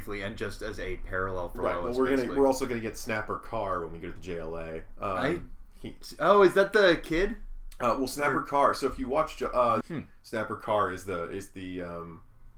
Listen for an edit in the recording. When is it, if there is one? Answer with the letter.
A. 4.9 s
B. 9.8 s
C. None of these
B